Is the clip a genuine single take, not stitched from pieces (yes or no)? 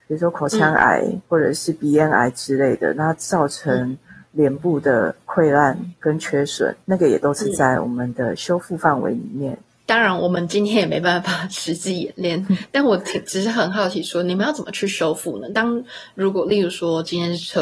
yes